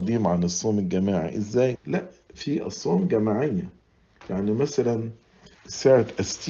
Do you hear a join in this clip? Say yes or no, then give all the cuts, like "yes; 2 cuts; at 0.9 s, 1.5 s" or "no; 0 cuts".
yes; 1 cut; at 1.7 s